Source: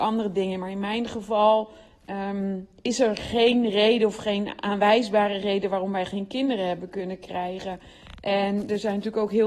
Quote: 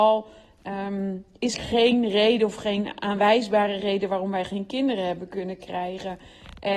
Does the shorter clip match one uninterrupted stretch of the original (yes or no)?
no